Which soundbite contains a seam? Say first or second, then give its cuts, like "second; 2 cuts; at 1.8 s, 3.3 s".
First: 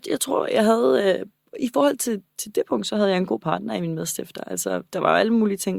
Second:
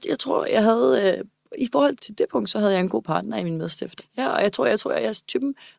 second; 2 cuts; at 2.0 s, 4.0 s